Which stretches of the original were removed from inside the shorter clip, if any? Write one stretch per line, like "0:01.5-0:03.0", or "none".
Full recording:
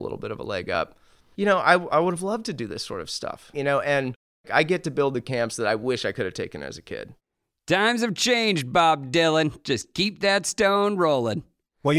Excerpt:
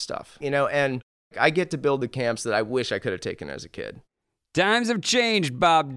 none